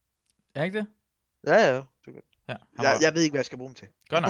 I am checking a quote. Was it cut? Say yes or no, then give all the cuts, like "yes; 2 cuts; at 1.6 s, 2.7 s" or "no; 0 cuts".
yes; 1 cut; at 1.3 s